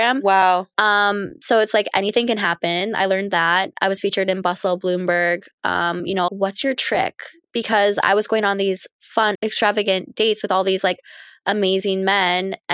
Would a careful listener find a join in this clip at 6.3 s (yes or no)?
yes